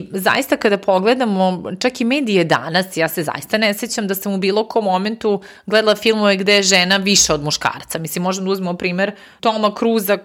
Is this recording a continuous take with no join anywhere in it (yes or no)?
yes